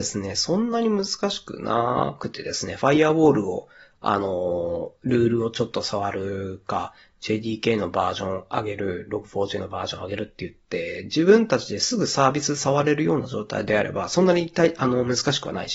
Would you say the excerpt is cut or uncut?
uncut